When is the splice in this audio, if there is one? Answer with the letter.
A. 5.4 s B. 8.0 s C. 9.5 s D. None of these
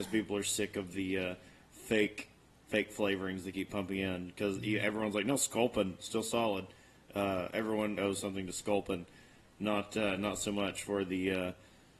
B